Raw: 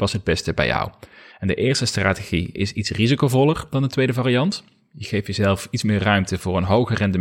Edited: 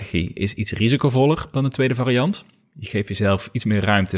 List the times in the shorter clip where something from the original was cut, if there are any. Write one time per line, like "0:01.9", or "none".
none